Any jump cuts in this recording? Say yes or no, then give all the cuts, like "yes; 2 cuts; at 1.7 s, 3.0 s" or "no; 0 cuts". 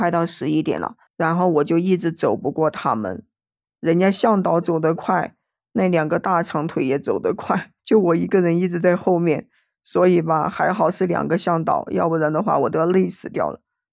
yes; 2 cuts; at 1.1 s, 7.8 s